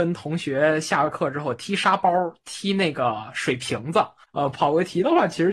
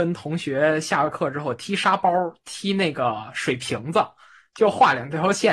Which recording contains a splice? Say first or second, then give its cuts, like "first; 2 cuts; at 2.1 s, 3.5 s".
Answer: first; 1 cut; at 4.2 s